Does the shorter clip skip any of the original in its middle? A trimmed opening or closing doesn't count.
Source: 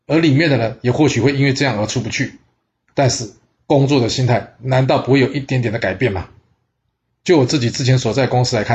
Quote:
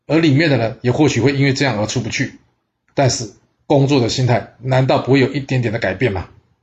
no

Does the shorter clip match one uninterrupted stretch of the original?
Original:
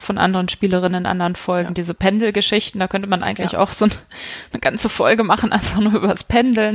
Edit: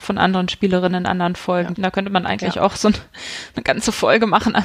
no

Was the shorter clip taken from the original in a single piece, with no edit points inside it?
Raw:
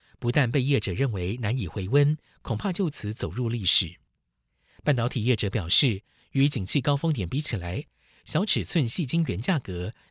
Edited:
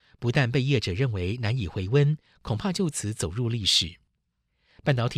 yes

